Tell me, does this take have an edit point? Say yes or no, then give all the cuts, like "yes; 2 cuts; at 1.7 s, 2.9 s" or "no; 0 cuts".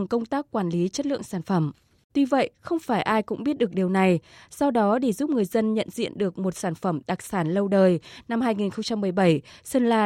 yes; 1 cut; at 2.1 s